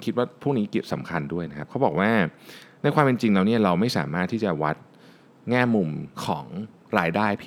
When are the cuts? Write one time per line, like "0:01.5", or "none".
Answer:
0:06.1